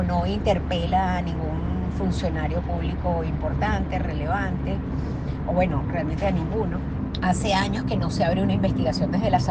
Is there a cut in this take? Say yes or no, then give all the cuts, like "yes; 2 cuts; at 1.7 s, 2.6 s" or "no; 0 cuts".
no; 0 cuts